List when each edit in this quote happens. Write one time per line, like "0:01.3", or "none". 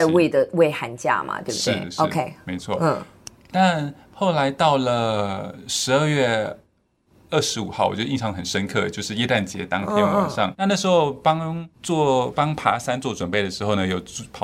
0:10.5
0:11.7

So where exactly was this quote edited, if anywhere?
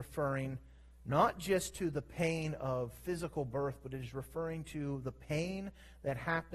none

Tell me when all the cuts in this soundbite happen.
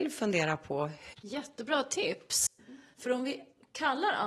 0:01.1
0:02.9

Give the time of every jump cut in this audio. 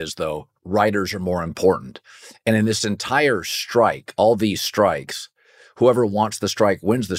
none

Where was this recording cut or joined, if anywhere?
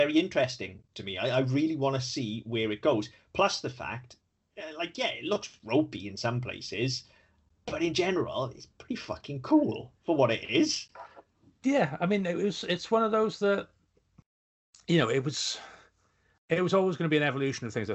none

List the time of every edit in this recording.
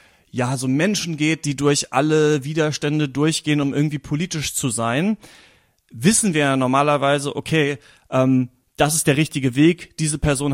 none

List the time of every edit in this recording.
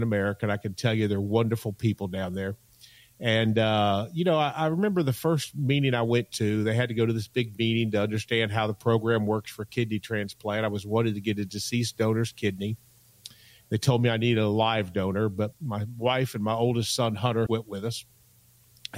0:15.5
0:17.5

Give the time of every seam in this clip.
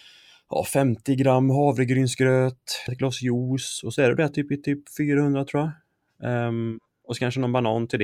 0:02.9

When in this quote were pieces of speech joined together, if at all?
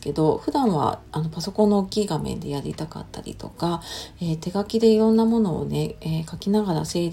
none

